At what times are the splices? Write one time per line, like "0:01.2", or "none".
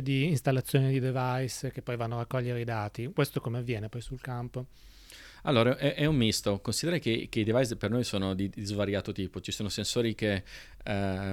none